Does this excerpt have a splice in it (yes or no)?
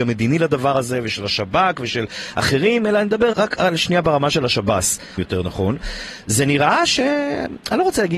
yes